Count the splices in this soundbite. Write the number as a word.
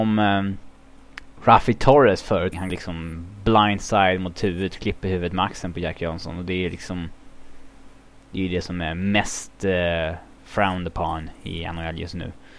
one